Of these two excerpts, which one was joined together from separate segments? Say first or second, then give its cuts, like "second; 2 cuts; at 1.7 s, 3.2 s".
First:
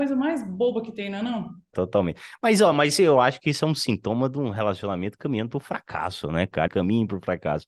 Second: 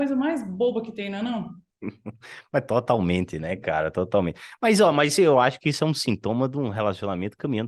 first; 2 cuts; at 1.7 s, 6.7 s